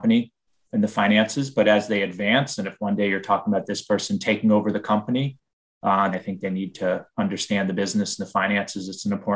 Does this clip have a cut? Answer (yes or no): yes